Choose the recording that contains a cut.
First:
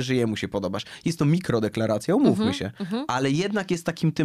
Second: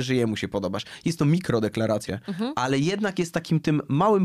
second; 1 cut; at 2.1 s

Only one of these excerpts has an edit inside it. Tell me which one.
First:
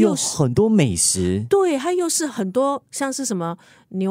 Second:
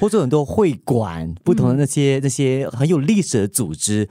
second; 1 cut; at 2.7 s

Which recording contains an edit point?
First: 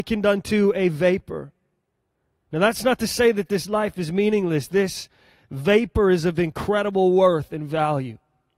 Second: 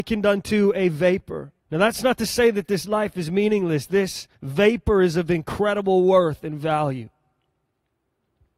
second; 2 cuts; at 1.6 s, 4.3 s

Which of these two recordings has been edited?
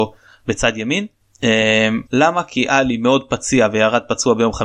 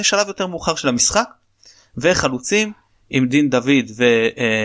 first; 1 cut; at 2.1 s

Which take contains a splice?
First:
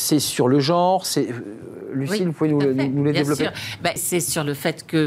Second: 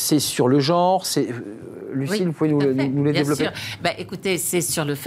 first; 1 cut; at 4.0 s

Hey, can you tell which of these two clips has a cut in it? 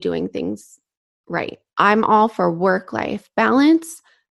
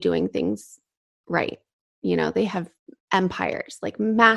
first; 1 cut; at 1.7 s

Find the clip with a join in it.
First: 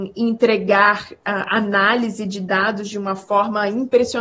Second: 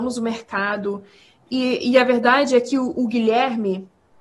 second; 1 cut; at 3.0 s

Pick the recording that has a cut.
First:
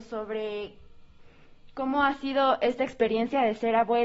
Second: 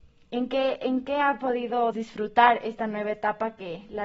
second; 1 cut; at 1.9 s

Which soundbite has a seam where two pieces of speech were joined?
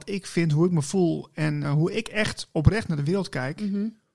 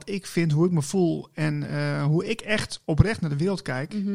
first; 1 cut; at 1.6 s

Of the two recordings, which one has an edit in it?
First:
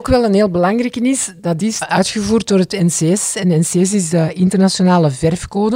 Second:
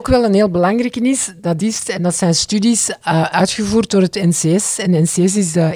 first; 1 cut; at 1.8 s

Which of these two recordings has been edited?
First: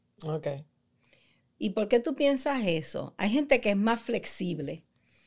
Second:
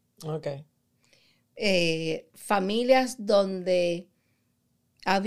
first; 1 cut; at 1.4 s

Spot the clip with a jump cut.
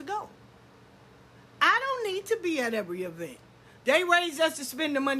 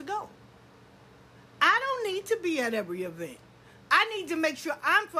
first; 1 cut; at 3.8 s

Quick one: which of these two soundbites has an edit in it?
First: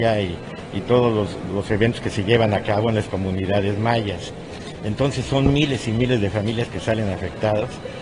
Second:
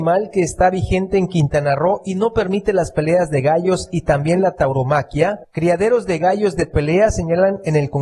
first; 1 cut; at 1.5 s

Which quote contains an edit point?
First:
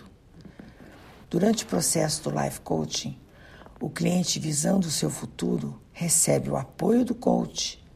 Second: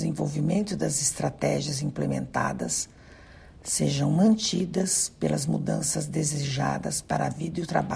first; 2 cuts; at 1.2 s, 5.9 s

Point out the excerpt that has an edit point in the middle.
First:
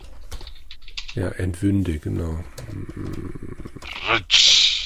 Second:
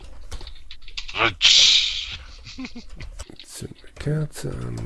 second; 1 cut; at 1.1 s

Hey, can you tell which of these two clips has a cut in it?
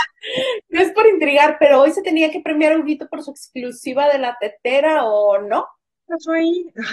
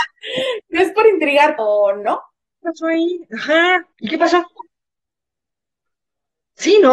second; 2 cuts; at 1.6 s, 3.9 s

